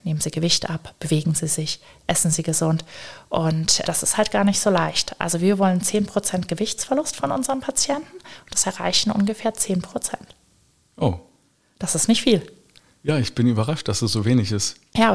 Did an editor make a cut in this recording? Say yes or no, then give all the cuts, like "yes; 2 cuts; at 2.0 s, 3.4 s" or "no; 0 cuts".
no; 0 cuts